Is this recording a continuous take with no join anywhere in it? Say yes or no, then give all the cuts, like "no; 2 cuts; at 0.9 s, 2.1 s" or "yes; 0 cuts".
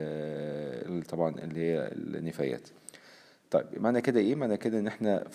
yes; 0 cuts